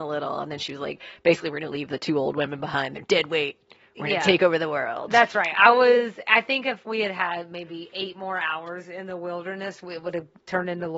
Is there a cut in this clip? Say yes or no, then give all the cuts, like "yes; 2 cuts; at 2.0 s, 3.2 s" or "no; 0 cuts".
no; 0 cuts